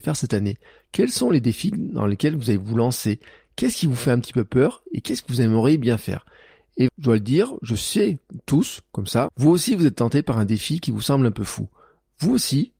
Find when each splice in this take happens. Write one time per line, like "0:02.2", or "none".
0:06.9
0:09.3